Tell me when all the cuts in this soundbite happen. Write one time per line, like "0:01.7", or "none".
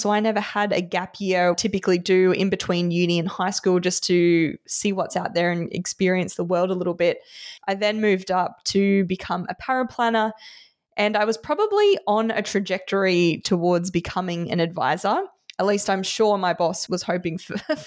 0:01.5
0:07.6
0:16.9